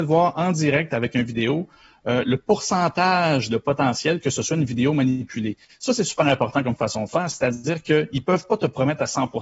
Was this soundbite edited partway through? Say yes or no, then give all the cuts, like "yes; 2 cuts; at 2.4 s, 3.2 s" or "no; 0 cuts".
no; 0 cuts